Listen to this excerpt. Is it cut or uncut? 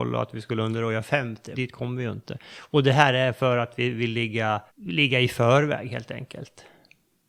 cut